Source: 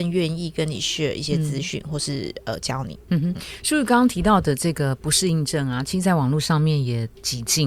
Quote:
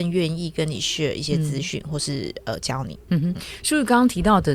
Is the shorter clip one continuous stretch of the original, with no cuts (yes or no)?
yes